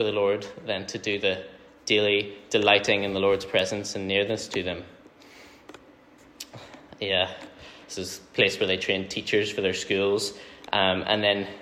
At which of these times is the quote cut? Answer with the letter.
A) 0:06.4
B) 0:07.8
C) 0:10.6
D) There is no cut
B